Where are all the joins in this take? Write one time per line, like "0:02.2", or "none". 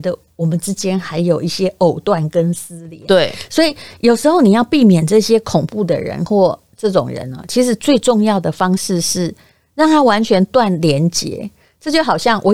none